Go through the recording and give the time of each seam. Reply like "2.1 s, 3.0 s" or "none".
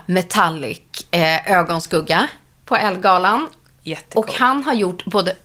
none